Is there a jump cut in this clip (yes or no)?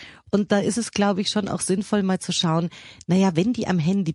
no